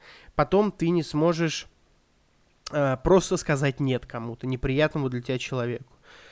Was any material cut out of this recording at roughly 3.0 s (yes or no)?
no